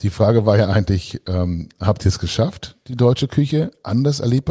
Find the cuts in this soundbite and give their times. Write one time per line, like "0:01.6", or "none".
none